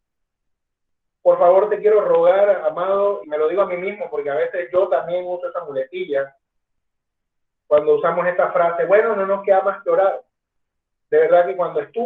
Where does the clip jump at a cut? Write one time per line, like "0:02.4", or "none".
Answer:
0:03.2